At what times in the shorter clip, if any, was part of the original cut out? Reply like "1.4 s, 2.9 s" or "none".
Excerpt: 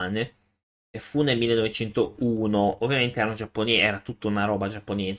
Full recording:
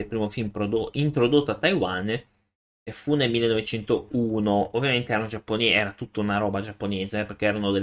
none